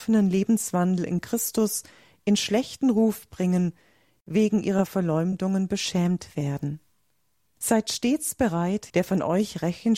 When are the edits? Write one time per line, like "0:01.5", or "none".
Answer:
0:07.6
0:08.9